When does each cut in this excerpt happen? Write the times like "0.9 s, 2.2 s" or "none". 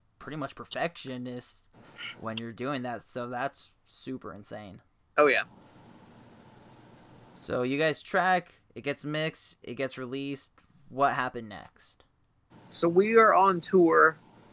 none